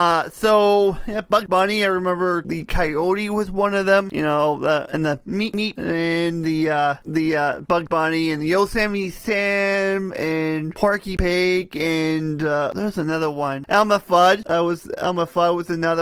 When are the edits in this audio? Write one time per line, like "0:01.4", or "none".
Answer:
none